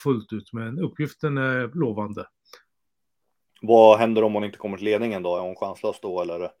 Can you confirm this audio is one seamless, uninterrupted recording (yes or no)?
yes